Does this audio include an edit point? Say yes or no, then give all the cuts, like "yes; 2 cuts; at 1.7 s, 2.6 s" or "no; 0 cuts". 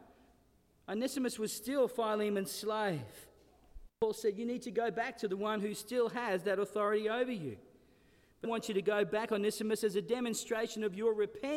yes; 2 cuts; at 3.9 s, 8.4 s